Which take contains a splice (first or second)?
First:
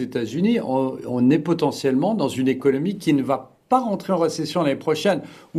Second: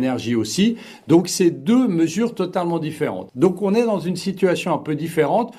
second